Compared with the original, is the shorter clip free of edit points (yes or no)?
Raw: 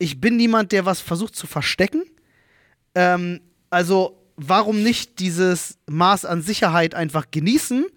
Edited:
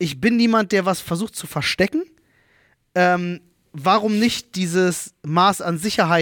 no